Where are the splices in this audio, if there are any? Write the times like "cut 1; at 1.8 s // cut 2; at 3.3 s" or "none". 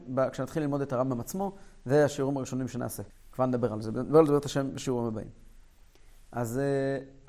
cut 1; at 3.1 s